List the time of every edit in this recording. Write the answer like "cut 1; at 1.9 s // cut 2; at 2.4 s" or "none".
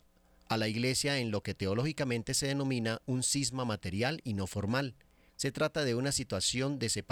cut 1; at 5.3 s